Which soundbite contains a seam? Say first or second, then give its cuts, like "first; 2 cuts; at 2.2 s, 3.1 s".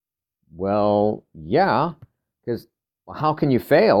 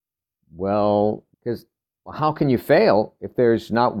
second; 1 cut; at 1.3 s